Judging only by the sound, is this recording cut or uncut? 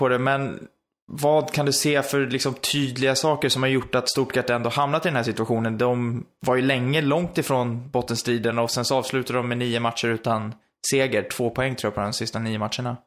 uncut